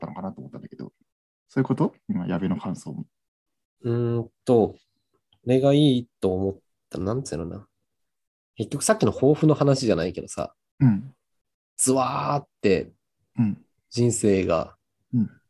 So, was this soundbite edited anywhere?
no; 0 cuts

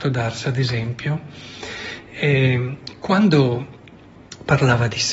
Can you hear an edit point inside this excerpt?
no; 0 cuts

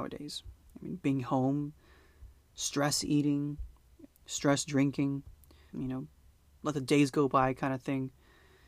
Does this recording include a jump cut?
yes; 2 cuts; at 4.1 s, 5.7 s

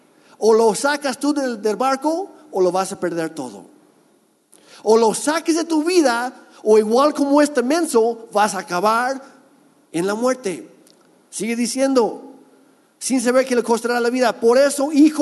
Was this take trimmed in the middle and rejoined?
no; 0 cuts

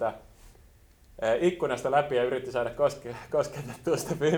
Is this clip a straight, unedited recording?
yes; 0 cuts

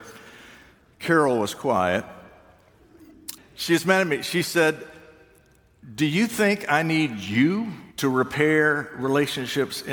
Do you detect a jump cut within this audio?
yes; 2 cuts; at 3.4 s, 7.9 s

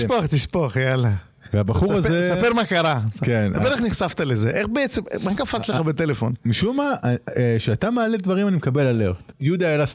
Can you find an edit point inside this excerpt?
no; 0 cuts

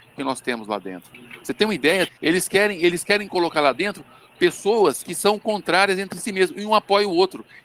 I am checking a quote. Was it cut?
yes; 1 cut; at 2.1 s

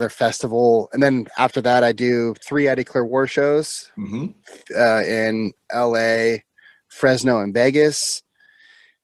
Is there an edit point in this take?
no; 0 cuts

